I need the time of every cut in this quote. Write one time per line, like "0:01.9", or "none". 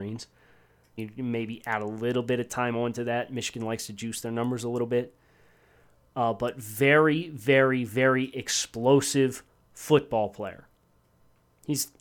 0:01.0